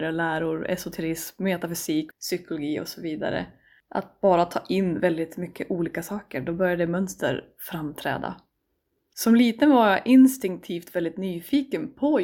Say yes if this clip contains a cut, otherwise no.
yes